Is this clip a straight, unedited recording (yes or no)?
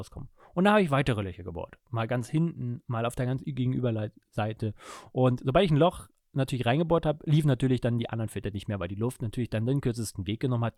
yes